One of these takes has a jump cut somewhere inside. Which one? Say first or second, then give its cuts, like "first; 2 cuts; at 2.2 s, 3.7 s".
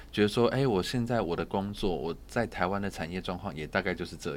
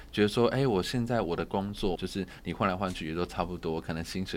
second; 1 cut; at 1.9 s